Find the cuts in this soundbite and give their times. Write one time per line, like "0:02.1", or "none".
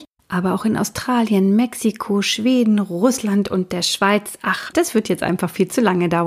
0:04.7